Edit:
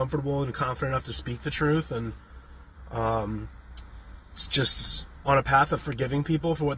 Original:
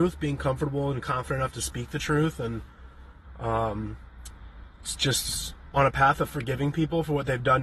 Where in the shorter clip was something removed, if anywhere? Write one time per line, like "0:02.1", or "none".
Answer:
none